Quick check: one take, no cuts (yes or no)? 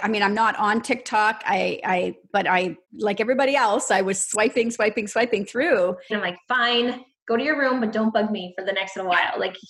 no